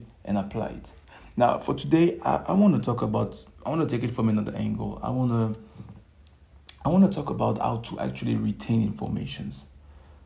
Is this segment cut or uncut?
uncut